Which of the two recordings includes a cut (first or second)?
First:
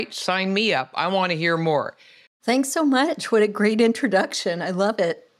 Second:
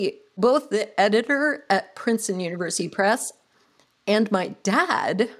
first